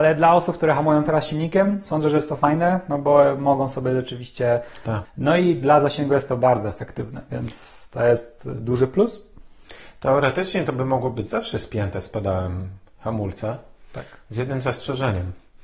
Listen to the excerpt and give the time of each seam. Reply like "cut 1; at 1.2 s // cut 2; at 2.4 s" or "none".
cut 1; at 5.0 s